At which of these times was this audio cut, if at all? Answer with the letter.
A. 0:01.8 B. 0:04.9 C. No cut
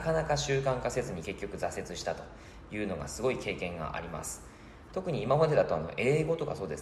B